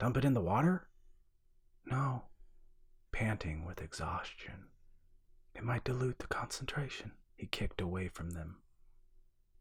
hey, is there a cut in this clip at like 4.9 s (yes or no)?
no